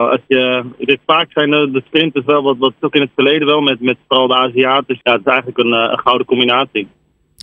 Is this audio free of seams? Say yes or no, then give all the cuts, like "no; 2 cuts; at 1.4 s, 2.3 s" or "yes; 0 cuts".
no; 2 cuts; at 2.8 s, 5.0 s